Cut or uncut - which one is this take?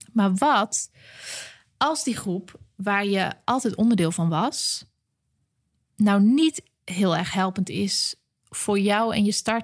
uncut